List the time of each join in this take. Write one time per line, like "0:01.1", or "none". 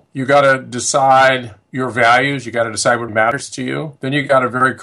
0:03.1